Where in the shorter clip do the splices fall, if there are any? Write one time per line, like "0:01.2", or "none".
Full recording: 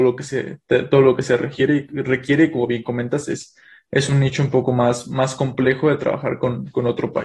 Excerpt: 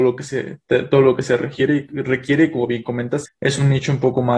0:03.3